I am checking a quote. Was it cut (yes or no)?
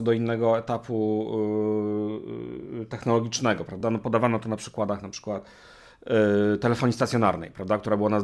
no